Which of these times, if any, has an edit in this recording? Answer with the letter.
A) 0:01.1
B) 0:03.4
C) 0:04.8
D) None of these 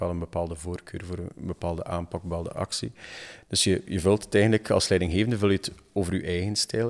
B